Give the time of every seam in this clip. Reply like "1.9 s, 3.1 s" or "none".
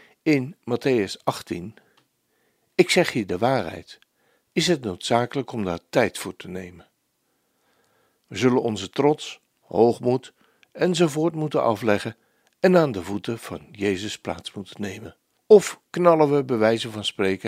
4.5 s, 15.4 s